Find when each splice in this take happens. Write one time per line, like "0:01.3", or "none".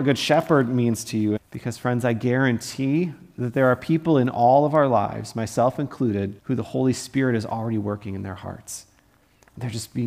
0:01.4
0:06.4